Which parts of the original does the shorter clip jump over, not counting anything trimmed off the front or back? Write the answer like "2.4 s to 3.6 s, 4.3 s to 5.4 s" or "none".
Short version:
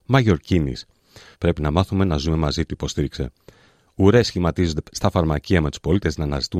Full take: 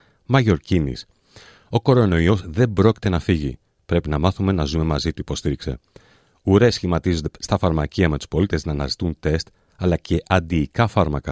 1.5 s to 3.8 s